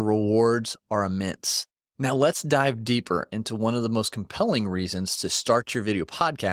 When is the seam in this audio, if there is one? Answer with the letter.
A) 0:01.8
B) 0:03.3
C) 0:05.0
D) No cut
A